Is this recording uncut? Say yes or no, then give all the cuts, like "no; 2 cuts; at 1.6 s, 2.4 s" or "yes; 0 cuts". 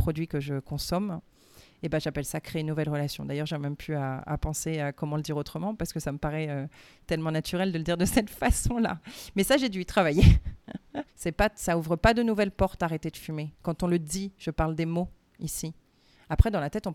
no; 1 cut; at 11.1 s